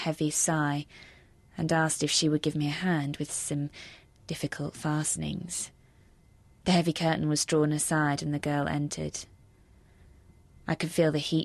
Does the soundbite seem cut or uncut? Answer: uncut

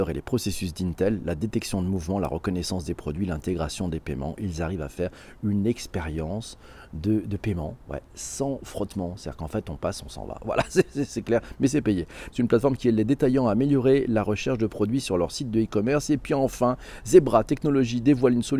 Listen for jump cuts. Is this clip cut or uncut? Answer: cut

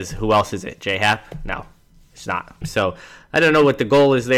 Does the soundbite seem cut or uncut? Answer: cut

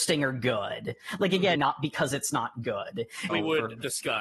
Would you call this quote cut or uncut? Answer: cut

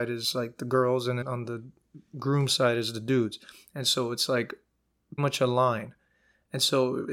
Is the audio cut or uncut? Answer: cut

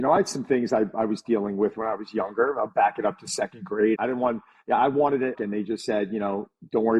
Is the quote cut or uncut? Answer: cut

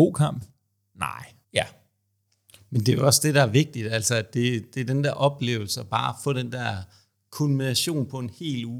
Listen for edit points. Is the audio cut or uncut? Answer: cut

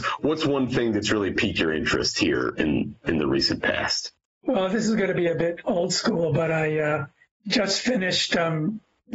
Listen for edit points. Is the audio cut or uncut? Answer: cut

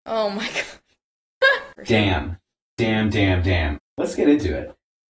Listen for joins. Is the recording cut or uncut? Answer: cut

